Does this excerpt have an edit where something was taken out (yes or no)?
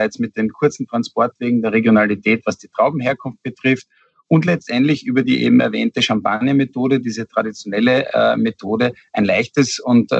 no